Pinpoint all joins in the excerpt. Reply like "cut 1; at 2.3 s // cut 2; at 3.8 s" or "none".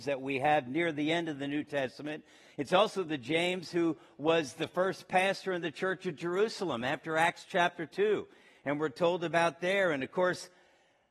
none